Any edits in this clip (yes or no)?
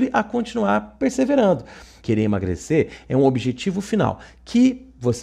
yes